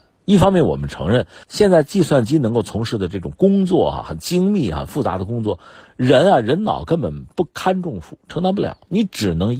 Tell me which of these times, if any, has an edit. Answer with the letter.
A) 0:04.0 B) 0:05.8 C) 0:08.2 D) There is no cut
D